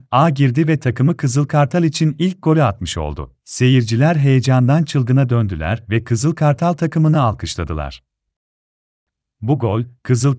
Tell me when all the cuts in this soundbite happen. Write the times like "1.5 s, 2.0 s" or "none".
3.4 s